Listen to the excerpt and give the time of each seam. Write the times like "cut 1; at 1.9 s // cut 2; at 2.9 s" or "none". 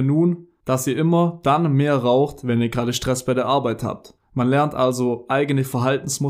cut 1; at 4.2 s